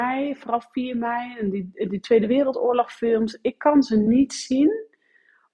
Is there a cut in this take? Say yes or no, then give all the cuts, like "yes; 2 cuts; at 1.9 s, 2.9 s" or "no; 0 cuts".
no; 0 cuts